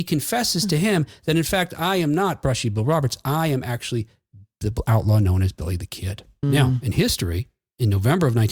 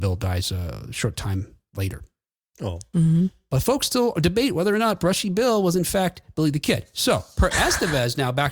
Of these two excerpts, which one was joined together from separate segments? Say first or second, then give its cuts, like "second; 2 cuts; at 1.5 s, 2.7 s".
first; 1 cut; at 6.4 s